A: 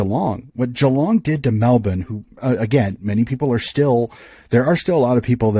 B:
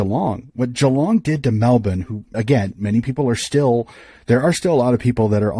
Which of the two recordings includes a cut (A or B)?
B